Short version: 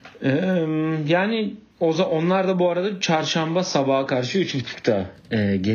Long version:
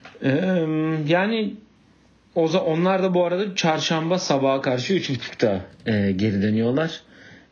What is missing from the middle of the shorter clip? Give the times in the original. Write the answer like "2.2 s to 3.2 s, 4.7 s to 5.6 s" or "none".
1.7 s to 2.2 s